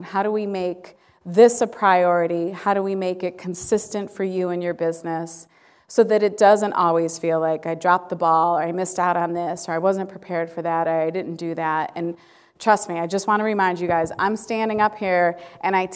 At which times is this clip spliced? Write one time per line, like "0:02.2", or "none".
none